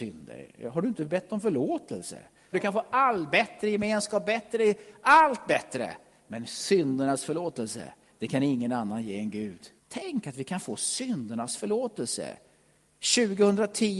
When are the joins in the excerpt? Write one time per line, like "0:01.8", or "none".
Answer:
0:02.5
0:09.8